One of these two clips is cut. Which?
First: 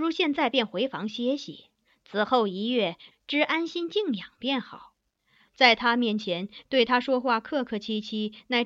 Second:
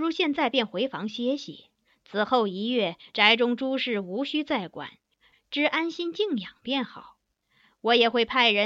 first; 3 cuts; at 3.1 s, 5.5 s, 6.6 s

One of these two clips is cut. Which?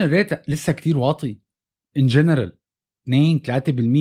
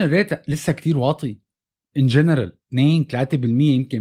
second; 1 cut; at 2.6 s

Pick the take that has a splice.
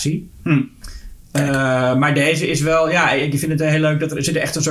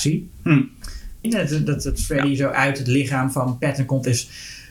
second; 1 cut; at 1.2 s

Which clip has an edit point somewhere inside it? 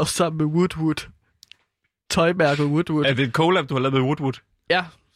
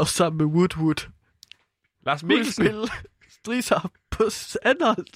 second; 1 cut; at 1.9 s

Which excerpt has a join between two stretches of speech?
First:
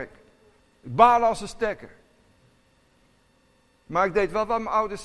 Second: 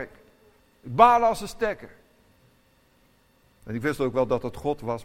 second; 1 cut; at 3.4 s

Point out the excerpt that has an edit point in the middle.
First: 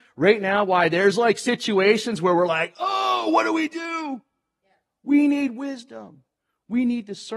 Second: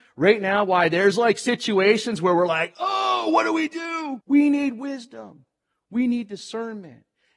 second; 1 cut; at 4.2 s

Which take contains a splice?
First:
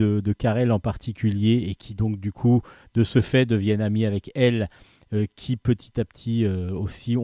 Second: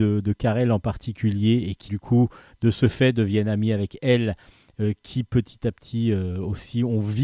second; 1 cut; at 1.9 s

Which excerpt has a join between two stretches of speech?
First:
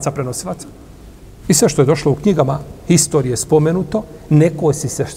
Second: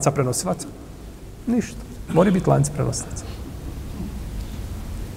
first; 1 cut; at 1.4 s

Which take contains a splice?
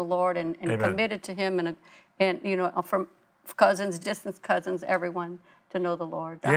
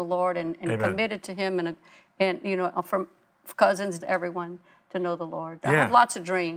second; 1 cut; at 4.0 s

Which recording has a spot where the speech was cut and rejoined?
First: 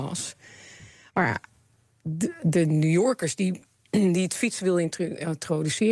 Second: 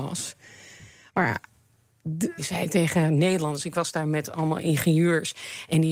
second; 1 cut; at 2.4 s

